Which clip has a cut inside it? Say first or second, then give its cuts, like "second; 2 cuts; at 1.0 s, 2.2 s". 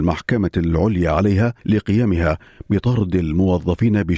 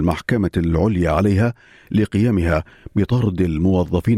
first; 1 cut; at 1.6 s